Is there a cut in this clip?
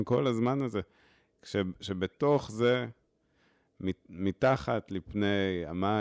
no; 0 cuts

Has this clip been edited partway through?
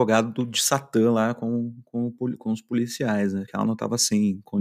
no; 0 cuts

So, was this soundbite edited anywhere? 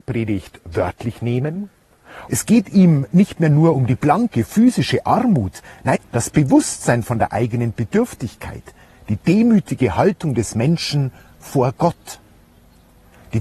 yes; 2 cuts; at 2.3 s, 6.0 s

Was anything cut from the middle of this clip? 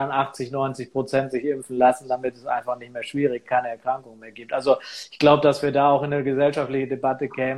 yes; 1 cut; at 3.4 s

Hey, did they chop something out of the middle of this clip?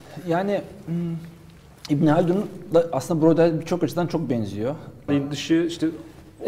yes; 1 cut; at 5.1 s

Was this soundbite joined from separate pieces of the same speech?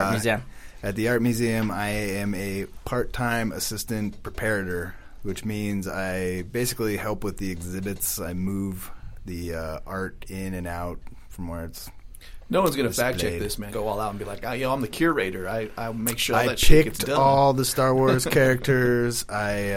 yes; 1 cut; at 13.7 s

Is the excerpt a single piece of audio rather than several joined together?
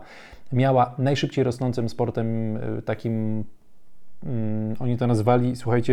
yes; 0 cuts

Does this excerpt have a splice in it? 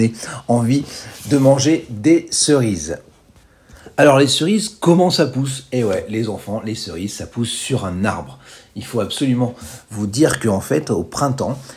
no; 0 cuts

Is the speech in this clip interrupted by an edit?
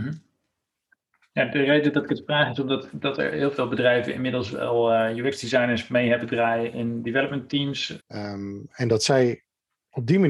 yes; 1 cut; at 8.0 s

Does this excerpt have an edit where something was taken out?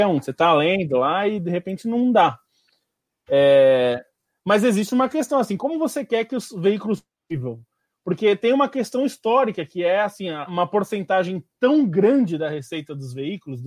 yes; 2 cuts; at 5.6 s, 10.5 s

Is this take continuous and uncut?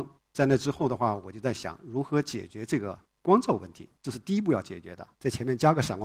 no; 1 cut; at 5.2 s

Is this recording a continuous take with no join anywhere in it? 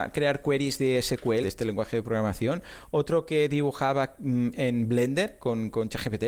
no; 1 cut; at 1.4 s

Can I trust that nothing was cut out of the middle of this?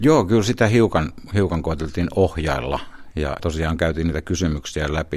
no; 1 cut; at 3.4 s

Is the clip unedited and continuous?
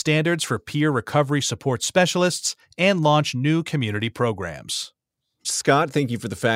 no; 1 cut; at 5.4 s

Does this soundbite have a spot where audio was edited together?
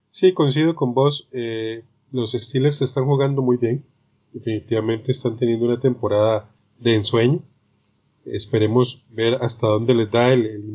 no; 0 cuts

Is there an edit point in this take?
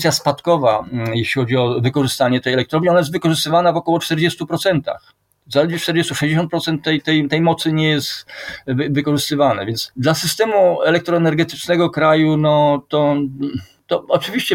no; 0 cuts

